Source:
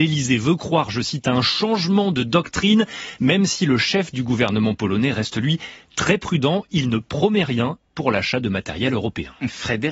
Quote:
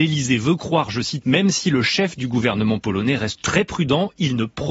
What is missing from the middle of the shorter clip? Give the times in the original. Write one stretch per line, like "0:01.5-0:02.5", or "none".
0:01.2-0:03.2
0:05.3-0:05.9